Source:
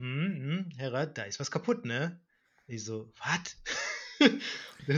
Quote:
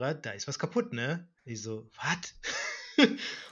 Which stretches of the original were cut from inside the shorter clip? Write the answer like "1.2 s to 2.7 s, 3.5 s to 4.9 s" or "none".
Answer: 2.3 s to 2.6 s